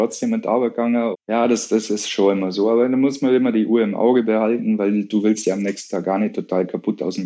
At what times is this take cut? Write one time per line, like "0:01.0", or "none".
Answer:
0:01.1